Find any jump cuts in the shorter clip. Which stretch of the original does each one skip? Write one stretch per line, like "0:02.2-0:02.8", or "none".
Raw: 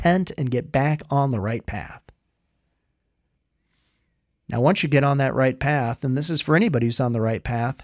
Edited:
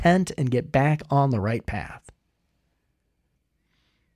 none